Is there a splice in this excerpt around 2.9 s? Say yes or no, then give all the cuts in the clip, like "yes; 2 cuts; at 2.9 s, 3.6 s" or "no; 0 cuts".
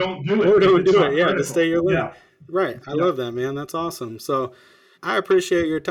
no; 1 cut; at 4.9 s